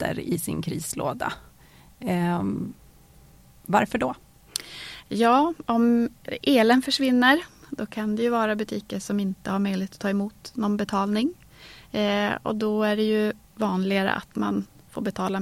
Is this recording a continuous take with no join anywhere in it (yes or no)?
yes